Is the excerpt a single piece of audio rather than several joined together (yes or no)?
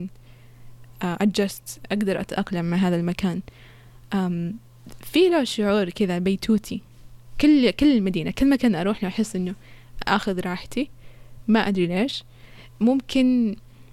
yes